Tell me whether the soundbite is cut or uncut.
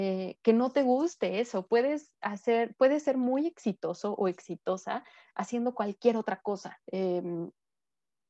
cut